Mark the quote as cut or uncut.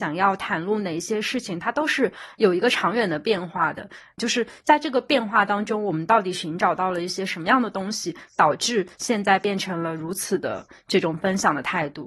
cut